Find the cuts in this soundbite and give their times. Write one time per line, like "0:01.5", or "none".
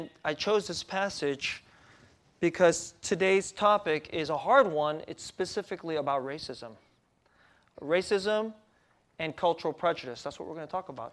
none